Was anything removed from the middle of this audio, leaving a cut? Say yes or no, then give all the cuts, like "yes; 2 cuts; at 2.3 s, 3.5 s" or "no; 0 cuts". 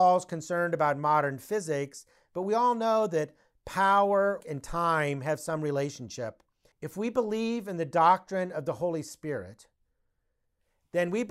yes; 2 cuts; at 4.4 s, 6.7 s